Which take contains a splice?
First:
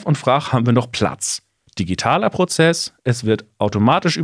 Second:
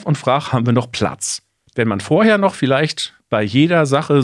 second; 1 cut; at 1.7 s

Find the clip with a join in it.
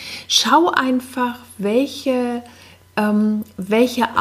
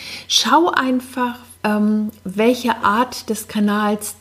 second; 1 cut; at 1.5 s

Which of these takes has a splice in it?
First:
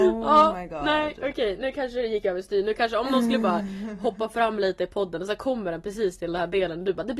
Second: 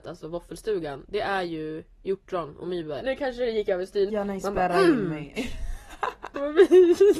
second; 3 cuts; at 3.0 s, 4.1 s, 5.4 s

